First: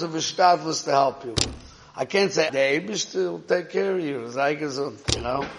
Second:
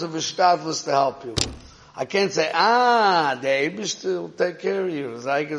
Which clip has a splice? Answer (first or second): first